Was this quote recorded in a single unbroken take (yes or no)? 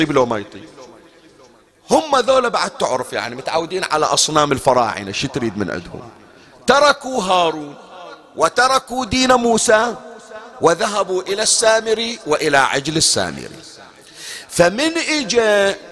yes